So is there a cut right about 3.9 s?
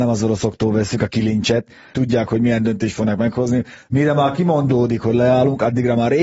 no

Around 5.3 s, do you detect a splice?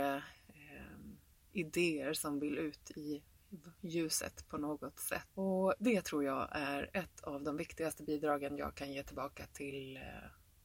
yes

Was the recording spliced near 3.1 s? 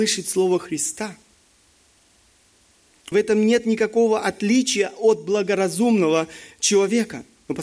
yes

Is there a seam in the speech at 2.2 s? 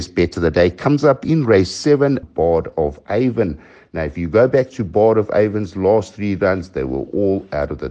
yes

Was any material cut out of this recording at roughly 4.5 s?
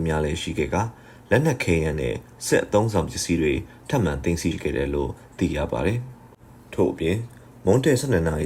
yes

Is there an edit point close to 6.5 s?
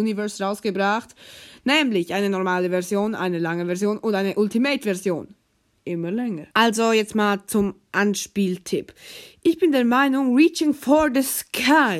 yes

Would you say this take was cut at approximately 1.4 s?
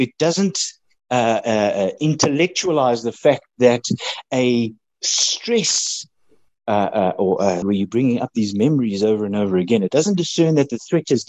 no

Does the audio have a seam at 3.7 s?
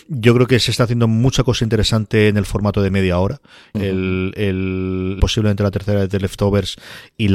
yes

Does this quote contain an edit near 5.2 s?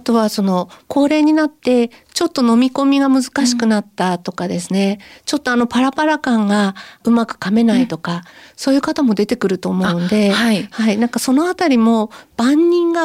no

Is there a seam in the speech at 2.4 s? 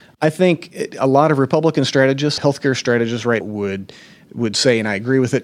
yes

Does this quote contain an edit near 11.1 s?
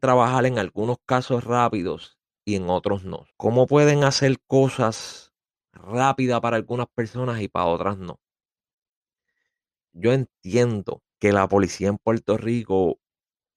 yes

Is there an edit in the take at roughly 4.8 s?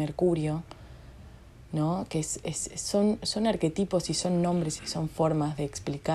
yes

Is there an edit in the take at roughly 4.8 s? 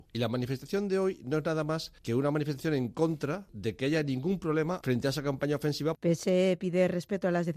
yes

